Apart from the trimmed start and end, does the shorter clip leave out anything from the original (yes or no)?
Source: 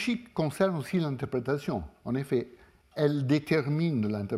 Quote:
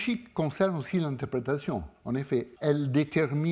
yes